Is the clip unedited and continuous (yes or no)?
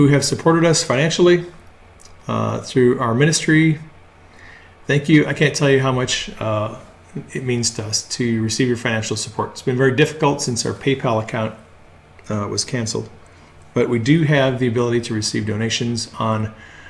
yes